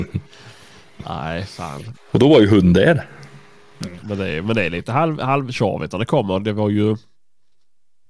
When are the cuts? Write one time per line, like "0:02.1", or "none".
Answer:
0:01.9
0:04.0